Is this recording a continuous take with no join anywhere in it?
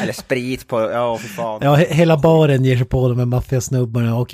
yes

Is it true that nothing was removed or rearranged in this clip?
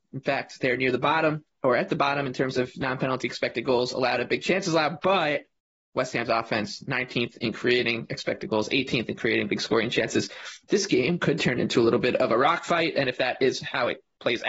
yes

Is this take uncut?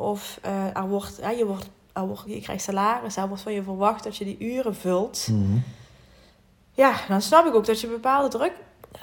no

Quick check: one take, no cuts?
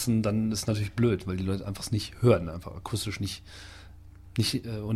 yes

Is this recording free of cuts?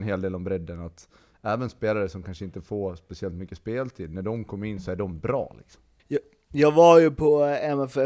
no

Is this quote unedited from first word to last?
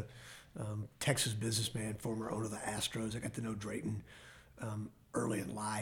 yes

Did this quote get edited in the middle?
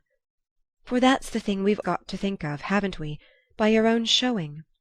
yes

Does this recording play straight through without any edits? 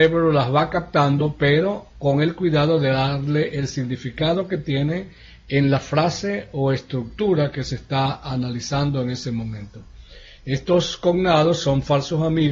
yes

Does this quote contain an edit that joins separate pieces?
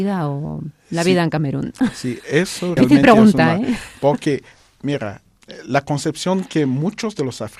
yes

